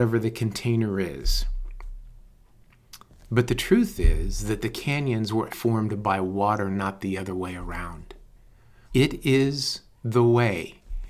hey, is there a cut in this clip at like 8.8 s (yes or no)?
yes